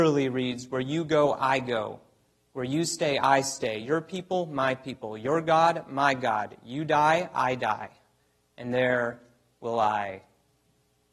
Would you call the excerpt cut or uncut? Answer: uncut